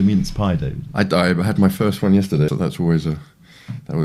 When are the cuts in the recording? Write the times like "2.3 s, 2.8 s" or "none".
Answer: 2.5 s